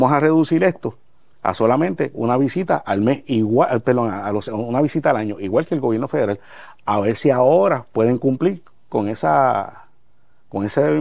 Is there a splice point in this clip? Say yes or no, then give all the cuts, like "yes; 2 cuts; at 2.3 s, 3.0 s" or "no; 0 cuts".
no; 0 cuts